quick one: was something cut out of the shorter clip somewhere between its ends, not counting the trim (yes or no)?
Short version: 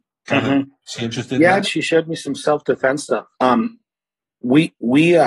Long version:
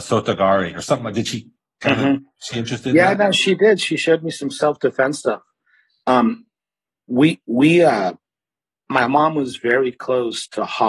yes